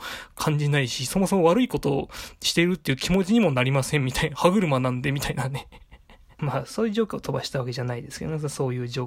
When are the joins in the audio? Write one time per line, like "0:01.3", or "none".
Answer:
0:06.4

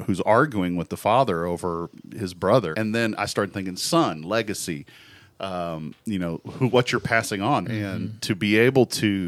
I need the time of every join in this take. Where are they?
0:02.7
0:07.6

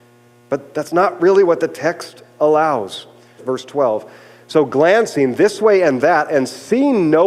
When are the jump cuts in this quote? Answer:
0:03.4

